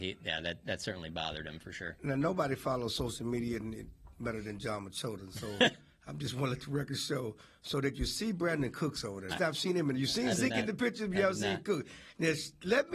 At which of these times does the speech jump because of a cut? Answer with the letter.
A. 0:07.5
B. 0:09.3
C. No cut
B